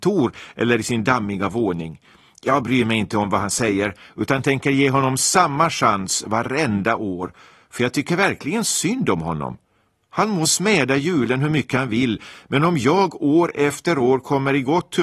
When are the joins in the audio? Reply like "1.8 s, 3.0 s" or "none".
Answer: none